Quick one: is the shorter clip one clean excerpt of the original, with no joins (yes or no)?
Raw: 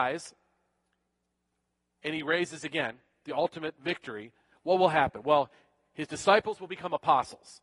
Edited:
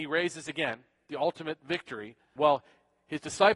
no